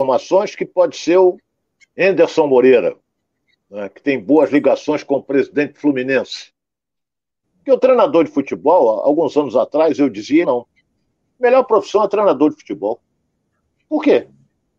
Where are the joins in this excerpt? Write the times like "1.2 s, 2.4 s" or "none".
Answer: 7.4 s, 10.4 s